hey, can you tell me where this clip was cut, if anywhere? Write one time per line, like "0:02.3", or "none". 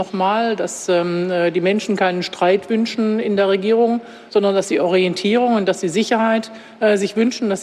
none